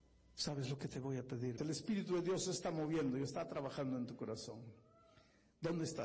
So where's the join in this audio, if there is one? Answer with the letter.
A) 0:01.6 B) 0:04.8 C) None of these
A